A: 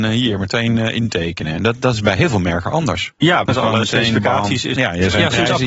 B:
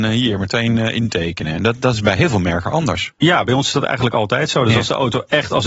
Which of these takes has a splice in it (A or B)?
A